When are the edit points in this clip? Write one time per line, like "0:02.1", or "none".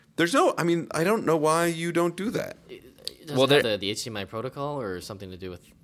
0:03.6